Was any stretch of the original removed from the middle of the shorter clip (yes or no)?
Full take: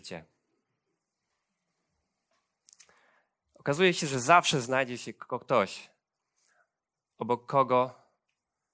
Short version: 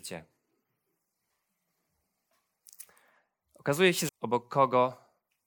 yes